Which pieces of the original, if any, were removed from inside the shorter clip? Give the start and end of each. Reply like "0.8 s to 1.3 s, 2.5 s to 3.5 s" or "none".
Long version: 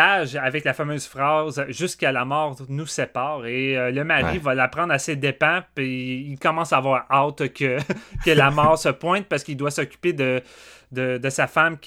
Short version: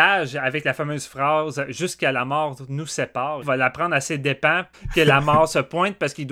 3.4 s to 4.4 s, 5.7 s to 8.0 s